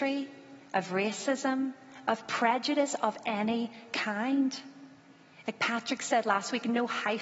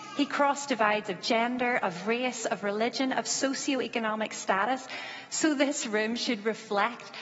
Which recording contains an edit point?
first; 1 cut; at 5.4 s

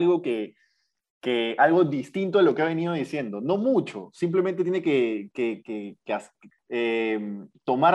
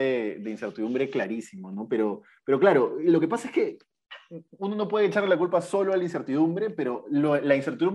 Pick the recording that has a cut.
first; 1 cut; at 6.5 s

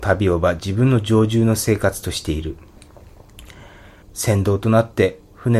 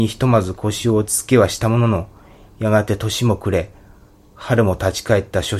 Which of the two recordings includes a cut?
first; 1 cut; at 4.0 s

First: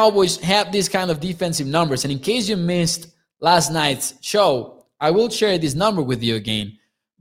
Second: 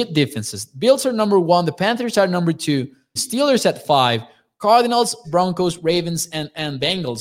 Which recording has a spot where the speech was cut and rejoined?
second; 2 cuts; at 3.2 s, 5.2 s

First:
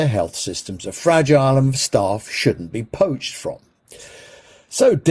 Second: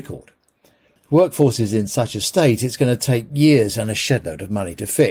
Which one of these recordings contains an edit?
second; 1 cut; at 1.0 s

